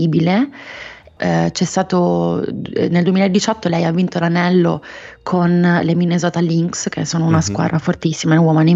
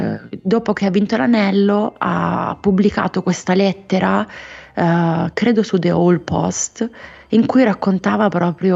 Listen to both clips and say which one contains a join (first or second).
first